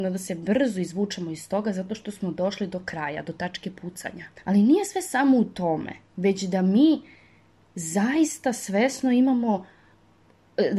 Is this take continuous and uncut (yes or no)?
no